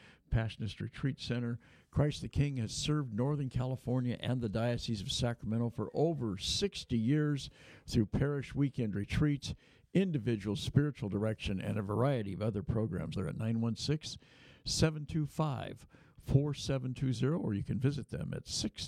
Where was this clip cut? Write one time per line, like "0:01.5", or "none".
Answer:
0:13.1